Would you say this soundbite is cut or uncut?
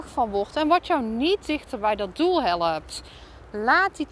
uncut